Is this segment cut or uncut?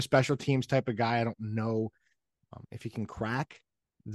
uncut